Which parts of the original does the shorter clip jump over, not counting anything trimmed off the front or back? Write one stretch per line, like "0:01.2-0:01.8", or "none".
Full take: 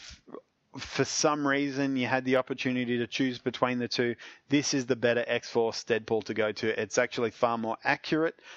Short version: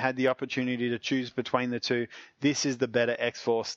none